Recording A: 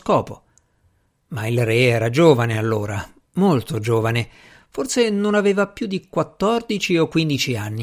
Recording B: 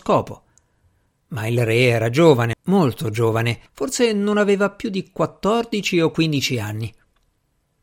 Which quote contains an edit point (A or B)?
B